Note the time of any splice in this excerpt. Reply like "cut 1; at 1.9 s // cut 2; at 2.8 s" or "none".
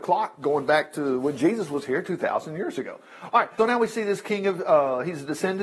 cut 1; at 3.6 s